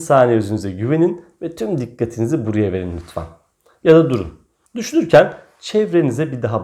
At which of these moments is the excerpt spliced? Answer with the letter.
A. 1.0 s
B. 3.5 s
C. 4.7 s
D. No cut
C